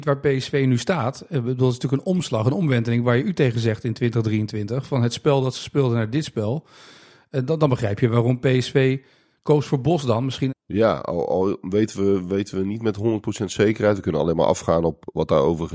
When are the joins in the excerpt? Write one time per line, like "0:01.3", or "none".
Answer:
0:10.5